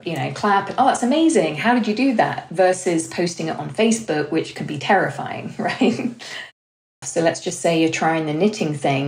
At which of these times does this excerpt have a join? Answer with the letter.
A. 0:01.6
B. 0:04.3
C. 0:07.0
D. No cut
C